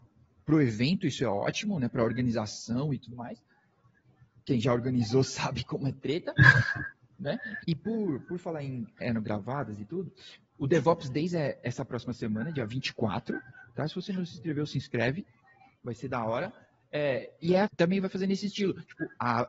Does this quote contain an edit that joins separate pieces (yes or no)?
yes